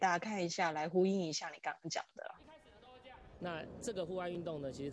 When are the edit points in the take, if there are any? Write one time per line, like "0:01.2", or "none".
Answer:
0:02.4
0:03.4